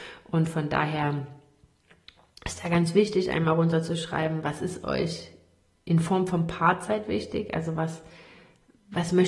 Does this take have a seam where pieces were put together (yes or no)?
no